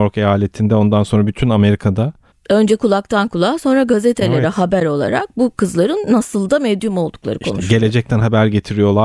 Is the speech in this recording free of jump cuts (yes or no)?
yes